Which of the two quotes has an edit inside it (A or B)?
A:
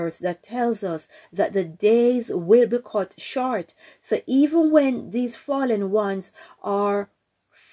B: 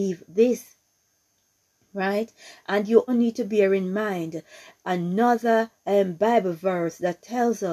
B